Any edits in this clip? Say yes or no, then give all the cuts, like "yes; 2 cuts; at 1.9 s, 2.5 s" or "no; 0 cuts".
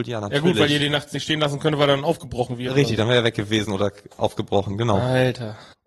no; 0 cuts